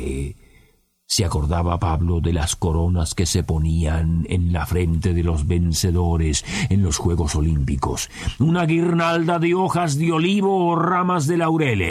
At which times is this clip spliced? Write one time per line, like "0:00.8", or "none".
none